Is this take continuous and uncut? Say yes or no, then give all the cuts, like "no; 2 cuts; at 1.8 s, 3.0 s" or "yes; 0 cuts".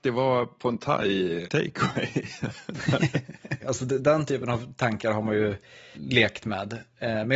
no; 3 cuts; at 1.4 s, 3.6 s, 5.9 s